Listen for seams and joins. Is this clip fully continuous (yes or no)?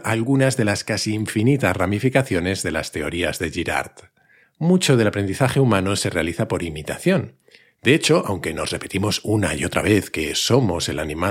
no